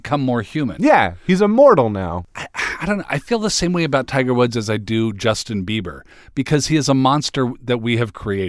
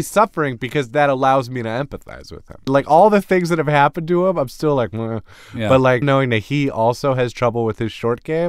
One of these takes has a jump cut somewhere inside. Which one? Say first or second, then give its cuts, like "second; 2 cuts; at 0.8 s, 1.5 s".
second; 2 cuts; at 2.7 s, 6.0 s